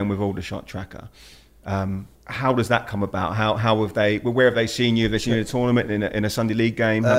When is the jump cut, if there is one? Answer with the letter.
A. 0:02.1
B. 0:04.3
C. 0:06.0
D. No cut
A